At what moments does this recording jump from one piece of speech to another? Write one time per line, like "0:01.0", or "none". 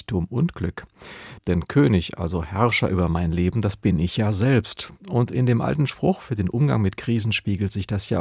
0:01.4